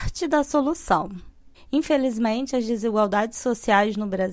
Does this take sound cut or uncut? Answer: cut